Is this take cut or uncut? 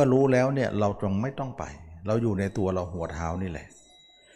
uncut